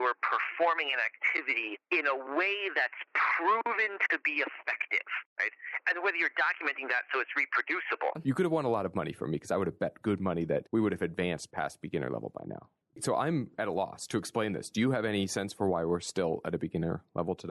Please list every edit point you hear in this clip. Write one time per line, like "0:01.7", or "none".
0:08.2